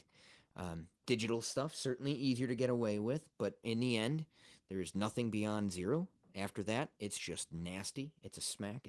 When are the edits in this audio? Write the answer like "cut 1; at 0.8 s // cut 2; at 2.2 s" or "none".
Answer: none